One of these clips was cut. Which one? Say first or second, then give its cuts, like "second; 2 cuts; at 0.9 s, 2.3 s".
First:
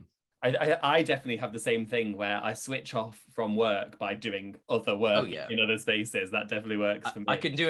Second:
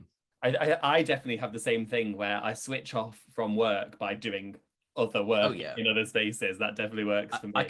first; 1 cut; at 4.6 s